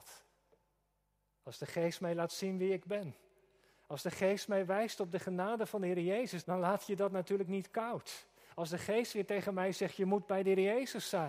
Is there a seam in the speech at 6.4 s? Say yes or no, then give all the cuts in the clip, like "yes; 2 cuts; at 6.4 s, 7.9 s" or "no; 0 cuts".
yes; 1 cut; at 6.4 s